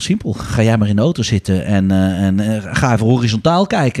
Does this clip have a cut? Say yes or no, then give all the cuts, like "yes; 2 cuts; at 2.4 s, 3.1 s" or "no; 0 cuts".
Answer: no; 0 cuts